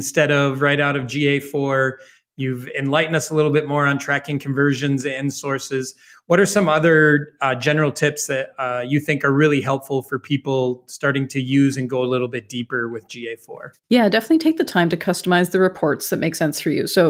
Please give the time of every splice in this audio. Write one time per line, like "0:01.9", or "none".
0:13.8